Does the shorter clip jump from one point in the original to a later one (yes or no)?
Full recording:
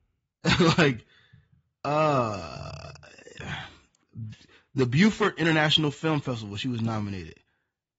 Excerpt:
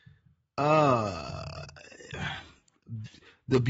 no